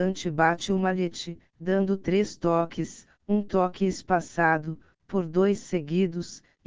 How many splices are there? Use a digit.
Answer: 0